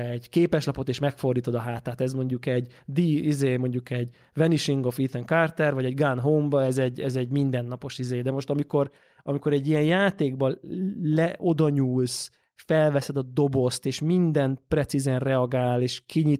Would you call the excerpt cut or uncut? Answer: uncut